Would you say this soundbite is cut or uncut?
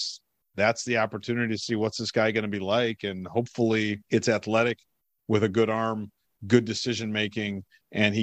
cut